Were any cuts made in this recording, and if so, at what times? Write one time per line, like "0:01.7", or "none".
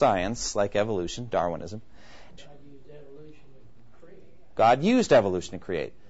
0:02.4